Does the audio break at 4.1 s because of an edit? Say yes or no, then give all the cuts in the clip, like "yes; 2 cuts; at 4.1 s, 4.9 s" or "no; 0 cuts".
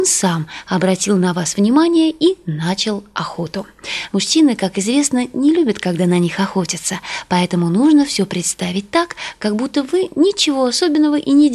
yes; 1 cut; at 4.1 s